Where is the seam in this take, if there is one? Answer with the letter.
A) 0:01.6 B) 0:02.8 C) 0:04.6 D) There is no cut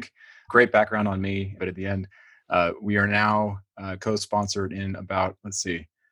A